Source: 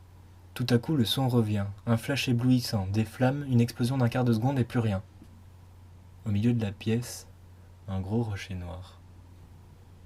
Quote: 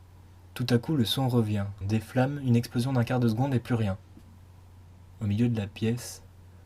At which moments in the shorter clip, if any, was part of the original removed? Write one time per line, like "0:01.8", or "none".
0:01.8